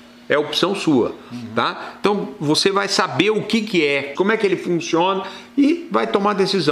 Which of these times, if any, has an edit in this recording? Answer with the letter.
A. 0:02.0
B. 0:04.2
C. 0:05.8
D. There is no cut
B